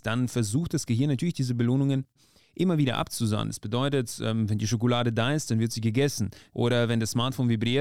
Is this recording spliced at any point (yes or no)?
no